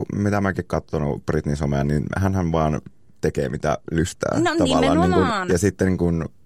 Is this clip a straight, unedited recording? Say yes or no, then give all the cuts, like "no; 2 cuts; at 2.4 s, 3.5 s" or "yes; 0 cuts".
yes; 0 cuts